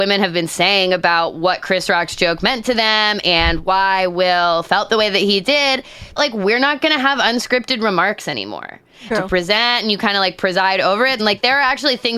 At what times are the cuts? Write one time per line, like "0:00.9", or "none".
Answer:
0:06.2
0:09.1
0:11.2